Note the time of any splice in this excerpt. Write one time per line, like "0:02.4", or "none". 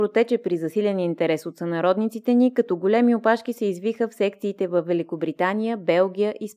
none